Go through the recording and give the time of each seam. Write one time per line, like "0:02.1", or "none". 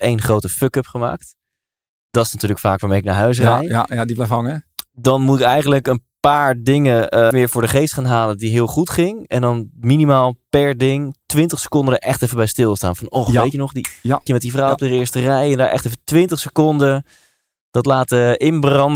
0:07.3
0:14.3